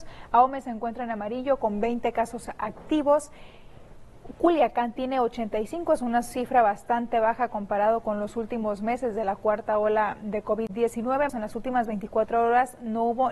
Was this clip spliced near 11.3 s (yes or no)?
yes